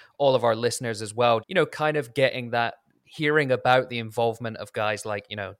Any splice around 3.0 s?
no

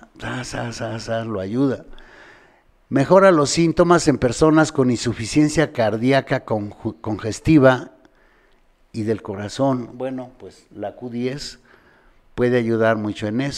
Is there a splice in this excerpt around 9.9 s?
yes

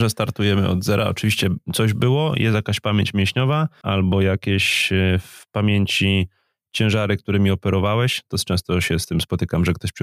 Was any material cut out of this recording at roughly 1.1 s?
no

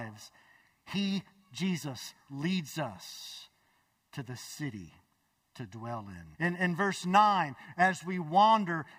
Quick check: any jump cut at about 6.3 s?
yes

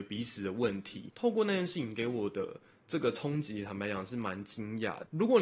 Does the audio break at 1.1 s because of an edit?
yes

